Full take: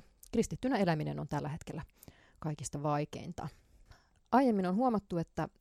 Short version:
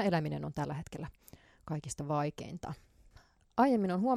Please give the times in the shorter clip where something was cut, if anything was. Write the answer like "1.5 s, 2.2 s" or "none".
none